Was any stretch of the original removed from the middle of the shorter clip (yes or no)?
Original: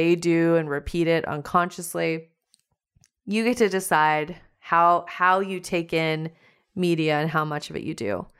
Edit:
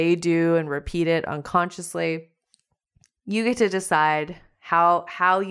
no